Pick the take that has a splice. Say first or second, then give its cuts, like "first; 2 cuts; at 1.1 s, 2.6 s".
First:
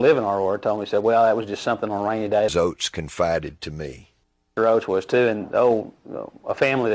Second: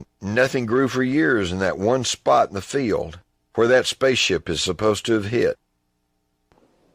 first; 2 cuts; at 2.5 s, 4.6 s